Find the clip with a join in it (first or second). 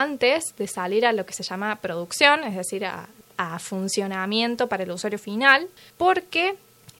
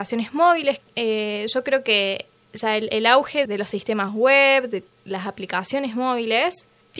second